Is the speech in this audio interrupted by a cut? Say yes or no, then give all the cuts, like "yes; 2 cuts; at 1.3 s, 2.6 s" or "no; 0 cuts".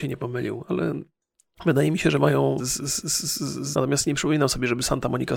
yes; 2 cuts; at 2.6 s, 3.7 s